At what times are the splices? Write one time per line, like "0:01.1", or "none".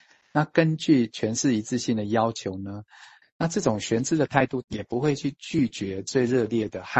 0:03.2
0:04.6